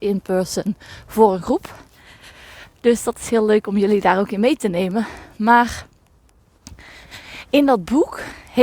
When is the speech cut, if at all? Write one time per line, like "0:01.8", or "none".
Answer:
none